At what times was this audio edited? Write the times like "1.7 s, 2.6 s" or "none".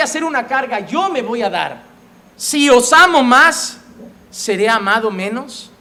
2.2 s